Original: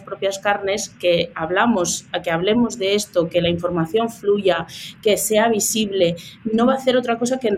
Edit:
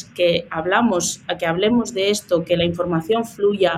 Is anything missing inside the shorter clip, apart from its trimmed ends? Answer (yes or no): no